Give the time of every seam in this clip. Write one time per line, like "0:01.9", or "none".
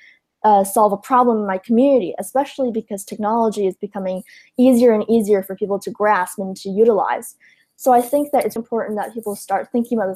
0:08.6